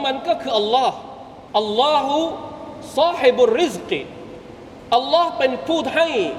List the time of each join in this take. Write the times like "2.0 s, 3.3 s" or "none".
1.5 s